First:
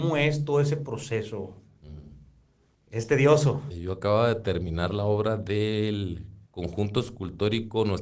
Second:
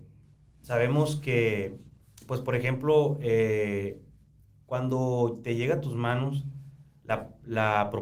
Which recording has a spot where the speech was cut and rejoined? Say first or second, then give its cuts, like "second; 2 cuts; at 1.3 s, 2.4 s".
first; 2 cuts; at 3.7 s, 6.4 s